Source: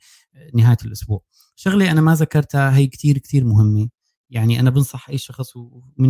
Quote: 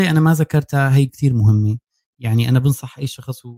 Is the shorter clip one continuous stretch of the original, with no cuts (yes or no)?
no